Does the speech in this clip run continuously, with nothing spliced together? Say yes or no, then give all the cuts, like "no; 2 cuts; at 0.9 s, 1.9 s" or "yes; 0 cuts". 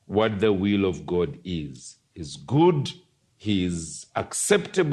no; 1 cut; at 3.3 s